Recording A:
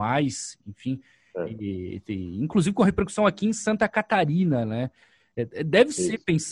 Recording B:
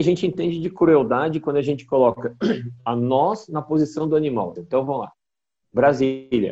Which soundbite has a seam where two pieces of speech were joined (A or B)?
B